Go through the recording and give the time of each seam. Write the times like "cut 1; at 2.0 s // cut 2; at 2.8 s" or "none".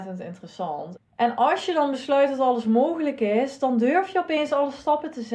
cut 1; at 0.9 s